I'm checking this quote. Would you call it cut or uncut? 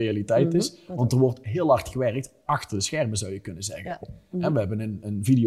cut